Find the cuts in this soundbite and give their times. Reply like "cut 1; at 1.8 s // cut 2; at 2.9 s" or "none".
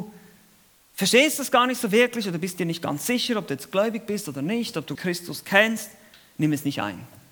cut 1; at 5.0 s